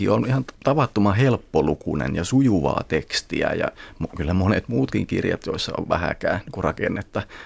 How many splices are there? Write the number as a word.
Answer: zero